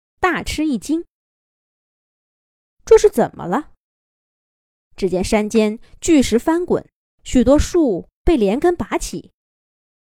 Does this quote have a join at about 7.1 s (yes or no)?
yes